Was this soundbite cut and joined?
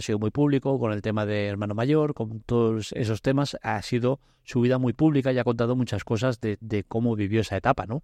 no; 0 cuts

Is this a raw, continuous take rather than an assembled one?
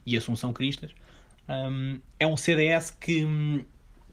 yes; 0 cuts

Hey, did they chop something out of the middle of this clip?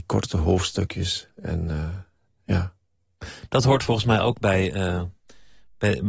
no; 0 cuts

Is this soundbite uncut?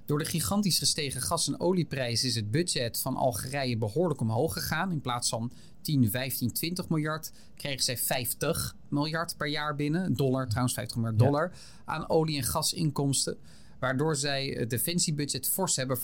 yes; 0 cuts

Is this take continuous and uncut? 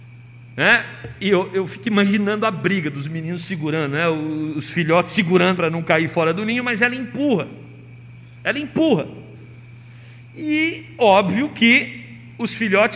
no; 1 cut; at 5.6 s

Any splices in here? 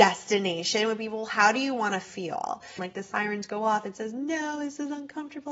yes; 1 cut; at 2.8 s

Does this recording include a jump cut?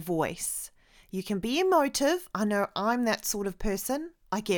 no; 0 cuts

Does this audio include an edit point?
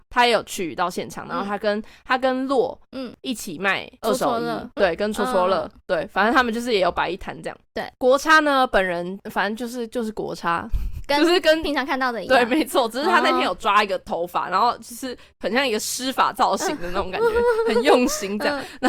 no; 0 cuts

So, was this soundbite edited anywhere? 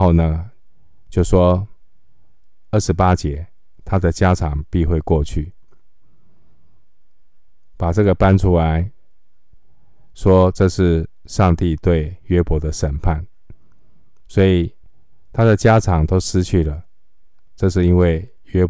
no; 0 cuts

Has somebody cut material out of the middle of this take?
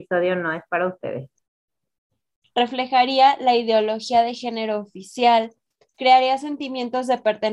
yes; 1 cut; at 2.4 s

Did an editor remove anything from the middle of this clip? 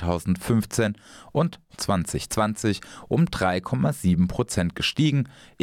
no; 0 cuts

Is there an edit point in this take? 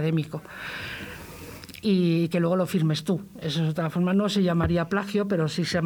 no; 0 cuts

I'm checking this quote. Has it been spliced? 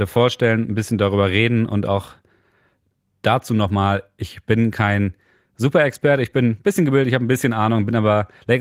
no; 0 cuts

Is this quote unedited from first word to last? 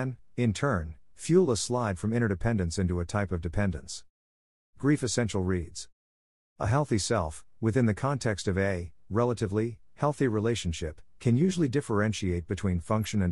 yes; 0 cuts

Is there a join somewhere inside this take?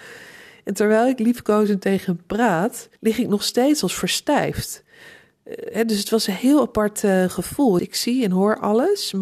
yes; 2 cuts; at 3.0 s, 7.8 s

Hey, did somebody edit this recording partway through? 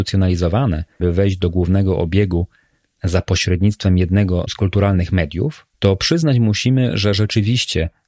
yes; 2 cuts; at 1.0 s, 5.7 s

